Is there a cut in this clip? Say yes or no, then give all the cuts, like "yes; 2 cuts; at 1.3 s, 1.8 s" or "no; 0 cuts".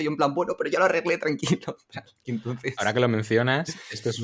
no; 0 cuts